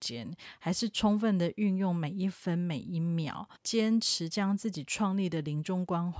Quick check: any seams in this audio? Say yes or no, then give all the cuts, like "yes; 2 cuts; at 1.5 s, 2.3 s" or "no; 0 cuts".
yes; 1 cut; at 3.6 s